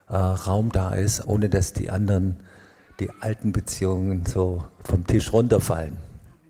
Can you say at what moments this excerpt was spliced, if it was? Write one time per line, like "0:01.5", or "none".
0:01.2